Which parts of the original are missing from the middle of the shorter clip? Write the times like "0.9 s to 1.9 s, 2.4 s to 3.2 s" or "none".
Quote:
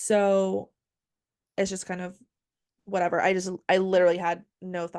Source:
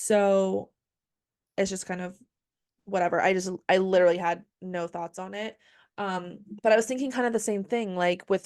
none